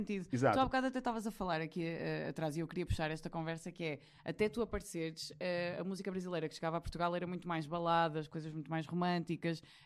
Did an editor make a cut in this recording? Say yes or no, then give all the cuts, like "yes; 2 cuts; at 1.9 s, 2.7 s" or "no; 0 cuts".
no; 0 cuts